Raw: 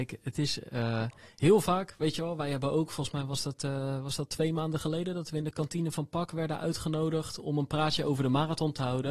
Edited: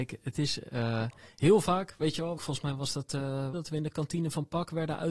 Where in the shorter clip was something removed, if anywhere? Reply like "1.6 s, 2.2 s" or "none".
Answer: 2.4 s, 3.5 s